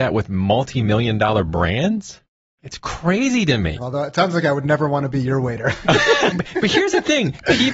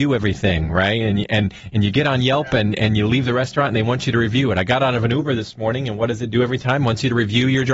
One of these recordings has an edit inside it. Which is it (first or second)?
first